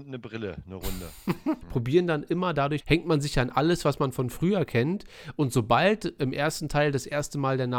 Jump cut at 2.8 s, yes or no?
yes